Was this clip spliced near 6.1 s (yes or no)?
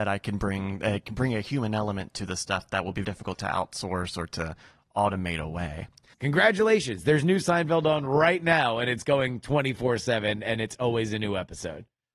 yes